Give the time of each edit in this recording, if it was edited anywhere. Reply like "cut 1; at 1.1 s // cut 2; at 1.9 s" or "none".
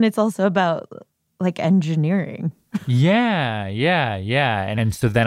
none